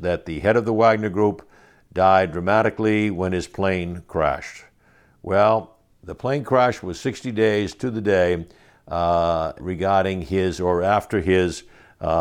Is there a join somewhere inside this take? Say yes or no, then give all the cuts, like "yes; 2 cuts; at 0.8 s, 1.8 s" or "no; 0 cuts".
yes; 1 cut; at 9.6 s